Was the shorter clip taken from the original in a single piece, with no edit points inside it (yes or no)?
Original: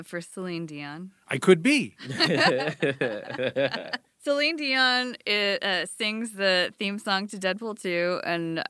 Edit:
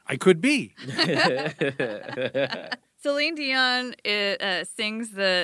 yes